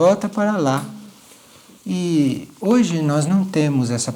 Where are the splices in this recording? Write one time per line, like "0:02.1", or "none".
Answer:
0:01.8